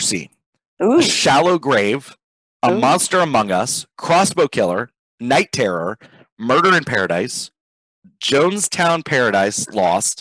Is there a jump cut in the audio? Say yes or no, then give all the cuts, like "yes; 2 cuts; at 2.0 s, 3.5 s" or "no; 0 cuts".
no; 0 cuts